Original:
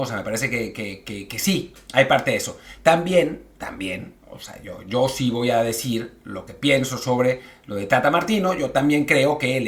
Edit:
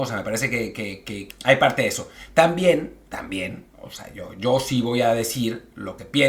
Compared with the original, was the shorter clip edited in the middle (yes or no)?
yes